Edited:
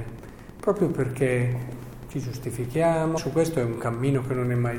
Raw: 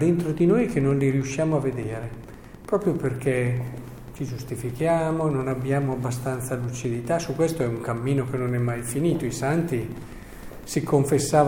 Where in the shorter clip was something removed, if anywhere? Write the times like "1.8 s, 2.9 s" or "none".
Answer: 3.2 s